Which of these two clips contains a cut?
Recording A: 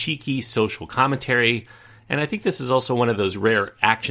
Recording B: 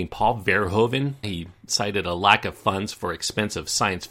B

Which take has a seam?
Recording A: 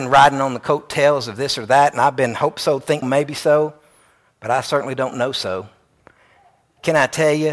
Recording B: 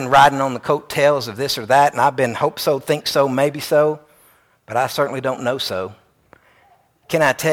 A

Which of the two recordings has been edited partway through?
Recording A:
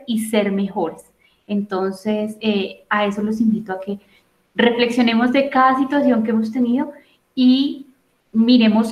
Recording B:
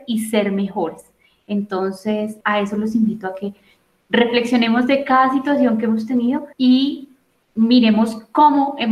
B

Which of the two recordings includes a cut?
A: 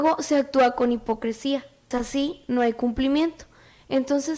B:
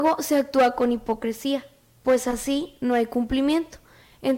A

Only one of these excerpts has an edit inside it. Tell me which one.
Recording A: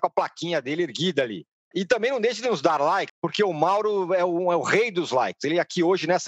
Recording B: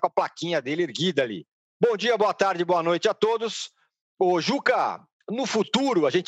A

